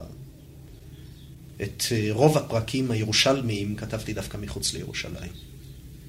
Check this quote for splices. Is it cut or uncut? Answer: cut